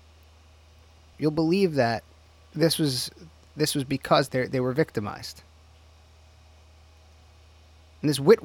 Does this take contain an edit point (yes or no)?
yes